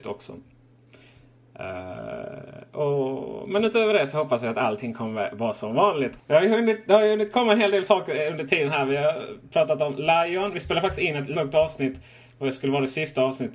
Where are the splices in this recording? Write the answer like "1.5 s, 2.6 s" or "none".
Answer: 6.2 s, 11.3 s